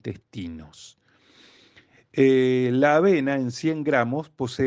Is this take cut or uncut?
uncut